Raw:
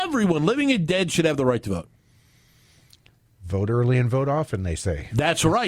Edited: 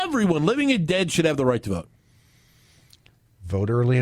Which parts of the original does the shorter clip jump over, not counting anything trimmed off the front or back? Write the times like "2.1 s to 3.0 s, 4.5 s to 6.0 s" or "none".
none

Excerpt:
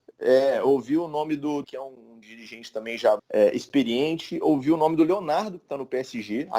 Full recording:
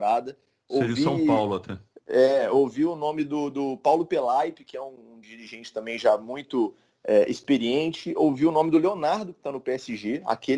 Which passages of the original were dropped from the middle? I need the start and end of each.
3.5 s to 4.6 s, 6.2 s to 6.9 s

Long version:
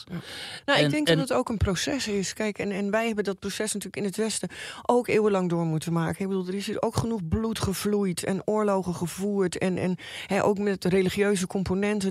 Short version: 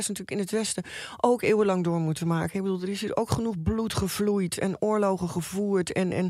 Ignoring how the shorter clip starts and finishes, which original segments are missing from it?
none

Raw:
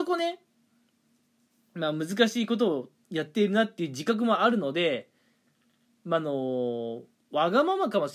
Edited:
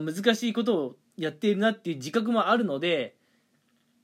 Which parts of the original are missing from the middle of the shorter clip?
none

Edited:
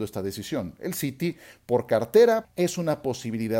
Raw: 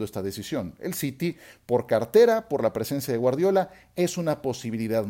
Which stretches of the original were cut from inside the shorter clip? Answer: 2.4 s to 3.8 s

